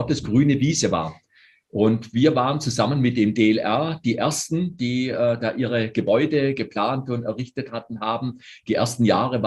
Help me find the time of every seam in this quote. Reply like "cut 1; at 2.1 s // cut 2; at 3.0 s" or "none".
none